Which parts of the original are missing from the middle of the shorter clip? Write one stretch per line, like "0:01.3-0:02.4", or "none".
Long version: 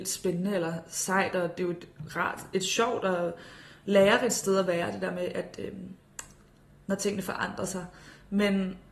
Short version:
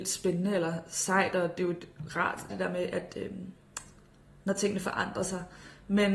0:02.5-0:04.9